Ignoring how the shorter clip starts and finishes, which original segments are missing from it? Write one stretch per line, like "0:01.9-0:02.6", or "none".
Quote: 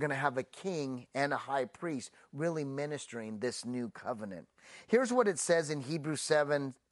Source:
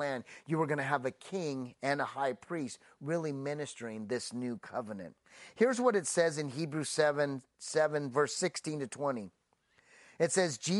none